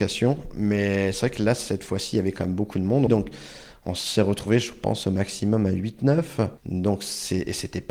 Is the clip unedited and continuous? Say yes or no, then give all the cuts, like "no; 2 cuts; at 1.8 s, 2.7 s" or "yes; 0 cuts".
no; 1 cut; at 3.1 s